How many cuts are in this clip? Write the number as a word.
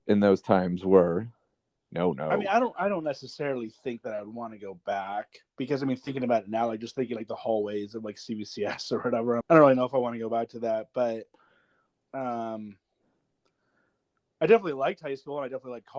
two